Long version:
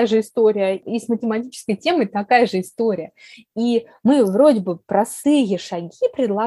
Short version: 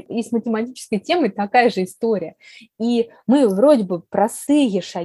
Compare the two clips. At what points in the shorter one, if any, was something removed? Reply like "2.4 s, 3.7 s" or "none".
none